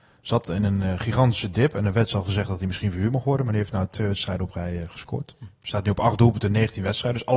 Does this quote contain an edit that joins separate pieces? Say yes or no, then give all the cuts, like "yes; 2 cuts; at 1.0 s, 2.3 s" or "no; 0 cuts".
no; 0 cuts